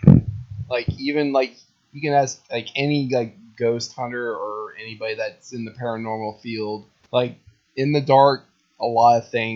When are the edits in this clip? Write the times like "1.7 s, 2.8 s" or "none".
none